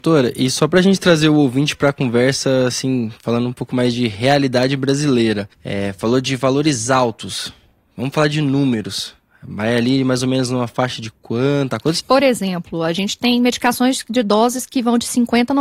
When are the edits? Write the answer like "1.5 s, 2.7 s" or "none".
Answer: 5.5 s, 12.0 s